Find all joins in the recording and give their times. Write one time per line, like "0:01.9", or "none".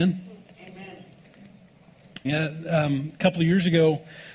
0:02.2